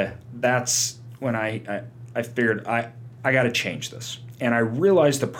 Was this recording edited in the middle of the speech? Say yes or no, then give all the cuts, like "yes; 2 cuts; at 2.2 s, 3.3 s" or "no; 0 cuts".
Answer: no; 0 cuts